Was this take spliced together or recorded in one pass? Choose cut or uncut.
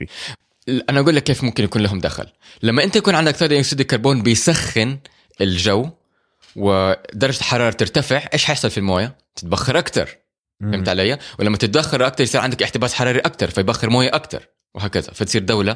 uncut